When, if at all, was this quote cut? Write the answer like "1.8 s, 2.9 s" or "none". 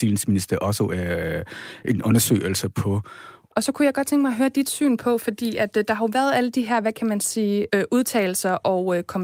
3.5 s, 7.7 s